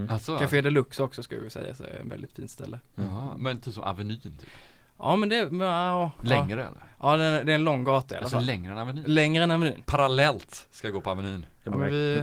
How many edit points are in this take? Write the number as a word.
one